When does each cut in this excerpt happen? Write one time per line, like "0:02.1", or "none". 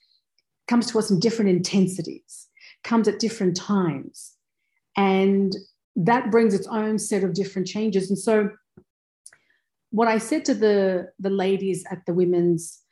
none